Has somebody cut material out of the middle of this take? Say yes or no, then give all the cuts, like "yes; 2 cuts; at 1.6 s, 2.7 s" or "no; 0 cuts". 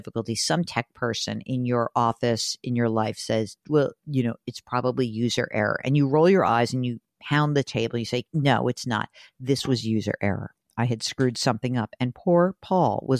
no; 0 cuts